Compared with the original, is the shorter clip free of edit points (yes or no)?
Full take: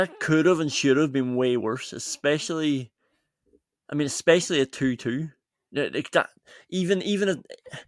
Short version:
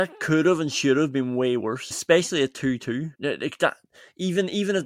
no